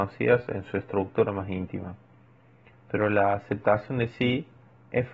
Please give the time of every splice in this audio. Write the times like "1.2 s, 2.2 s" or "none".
2.7 s